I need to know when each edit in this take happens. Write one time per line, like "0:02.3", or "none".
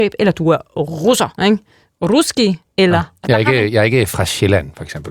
0:01.4
0:03.2